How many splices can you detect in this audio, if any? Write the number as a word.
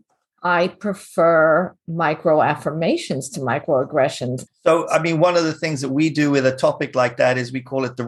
one